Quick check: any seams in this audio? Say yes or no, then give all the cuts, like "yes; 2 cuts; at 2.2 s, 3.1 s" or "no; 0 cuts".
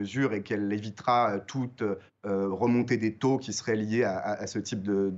no; 0 cuts